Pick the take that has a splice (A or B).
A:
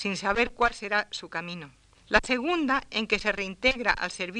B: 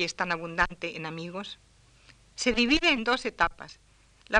A